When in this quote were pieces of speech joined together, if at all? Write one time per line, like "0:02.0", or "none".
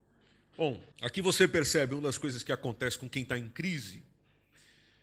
0:00.9

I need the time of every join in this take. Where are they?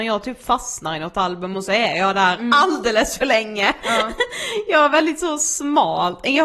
none

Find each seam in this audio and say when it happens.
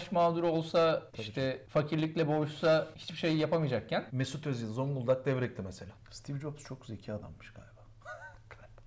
0:06.0

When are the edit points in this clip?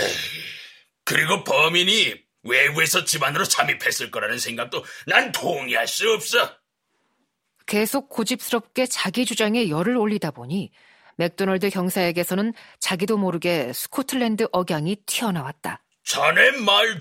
none

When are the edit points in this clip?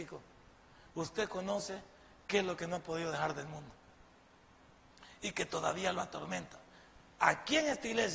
none

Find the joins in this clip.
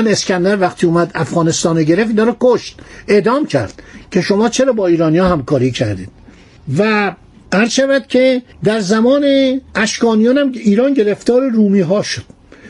0:08.5
0:09.7

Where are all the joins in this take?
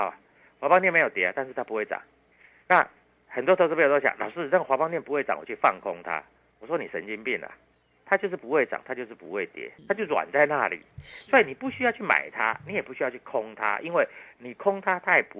none

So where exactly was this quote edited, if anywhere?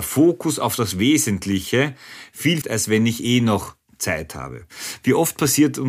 0:02.6

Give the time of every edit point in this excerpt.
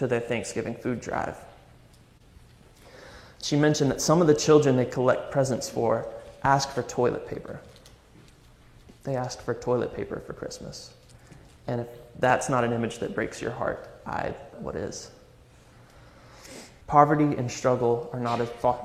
0:14.5
0:16.8

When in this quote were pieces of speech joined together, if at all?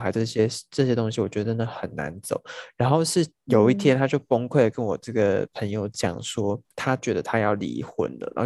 0:06.7

